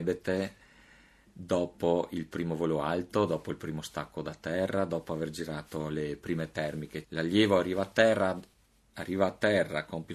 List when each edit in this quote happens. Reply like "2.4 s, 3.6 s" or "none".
7.0 s

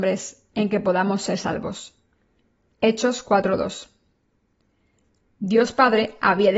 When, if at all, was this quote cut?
5.3 s

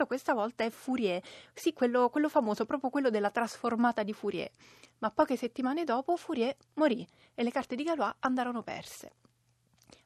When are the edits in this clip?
none

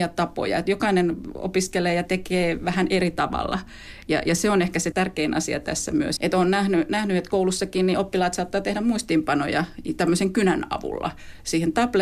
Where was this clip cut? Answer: 4.9 s, 6.2 s

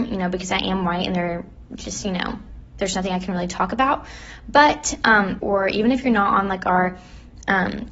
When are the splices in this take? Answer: 5.4 s

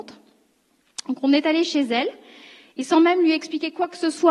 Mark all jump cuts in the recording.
none

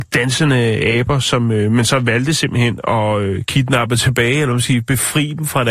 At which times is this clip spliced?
none

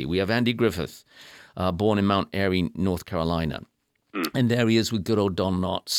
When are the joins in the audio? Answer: none

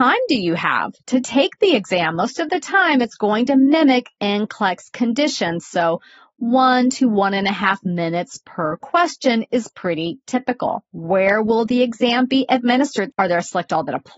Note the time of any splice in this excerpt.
10.9 s, 13.1 s

